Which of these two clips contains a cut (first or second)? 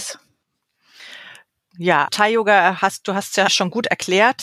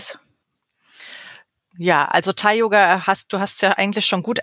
first